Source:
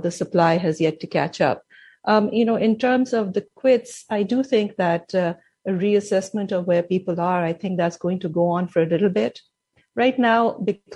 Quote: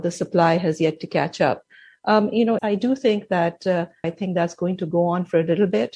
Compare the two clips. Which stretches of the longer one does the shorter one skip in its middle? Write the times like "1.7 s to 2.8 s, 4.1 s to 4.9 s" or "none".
2.6 s to 4.1 s, 5.5 s to 7.5 s